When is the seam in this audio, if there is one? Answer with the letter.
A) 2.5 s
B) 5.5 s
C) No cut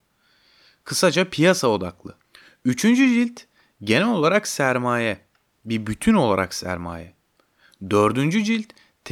C